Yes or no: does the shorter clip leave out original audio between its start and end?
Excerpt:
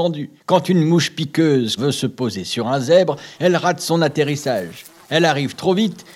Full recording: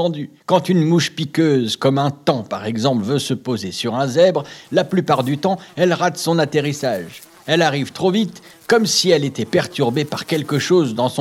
yes